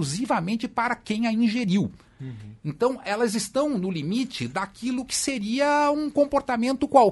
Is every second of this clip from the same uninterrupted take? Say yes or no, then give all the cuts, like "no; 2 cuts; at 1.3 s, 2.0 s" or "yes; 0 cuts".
yes; 0 cuts